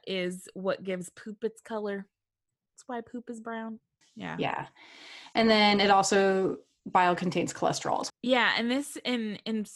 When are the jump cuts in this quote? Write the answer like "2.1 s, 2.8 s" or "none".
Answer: 4.0 s, 8.1 s